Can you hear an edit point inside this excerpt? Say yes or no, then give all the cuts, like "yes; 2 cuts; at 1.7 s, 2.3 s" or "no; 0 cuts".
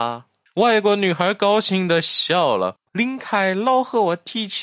yes; 1 cut; at 2.9 s